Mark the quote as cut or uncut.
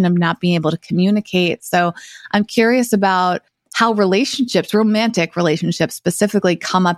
uncut